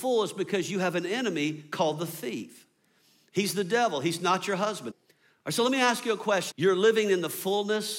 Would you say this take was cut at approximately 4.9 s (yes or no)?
yes